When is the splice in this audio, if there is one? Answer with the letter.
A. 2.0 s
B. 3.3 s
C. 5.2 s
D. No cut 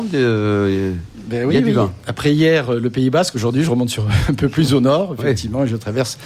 D